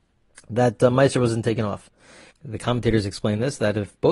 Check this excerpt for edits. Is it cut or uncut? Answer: cut